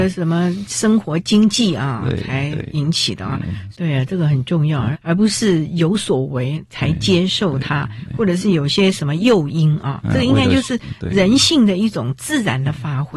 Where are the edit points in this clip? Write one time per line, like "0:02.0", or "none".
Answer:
0:03.7
0:04.9